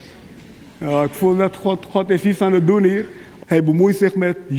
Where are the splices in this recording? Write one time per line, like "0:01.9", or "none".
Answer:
0:01.9
0:03.4